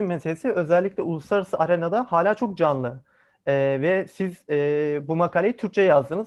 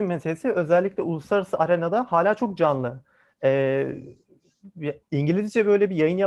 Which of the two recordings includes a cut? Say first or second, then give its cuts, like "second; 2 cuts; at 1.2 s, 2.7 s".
second; 2 cuts; at 3.3 s, 5.0 s